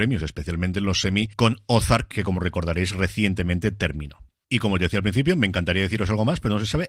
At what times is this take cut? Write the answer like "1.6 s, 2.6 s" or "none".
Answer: none